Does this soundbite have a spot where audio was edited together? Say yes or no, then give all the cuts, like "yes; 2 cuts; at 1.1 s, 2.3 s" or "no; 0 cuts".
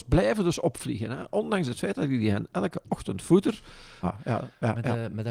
yes; 1 cut; at 4.0 s